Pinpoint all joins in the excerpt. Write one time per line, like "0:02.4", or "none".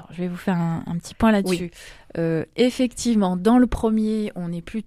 none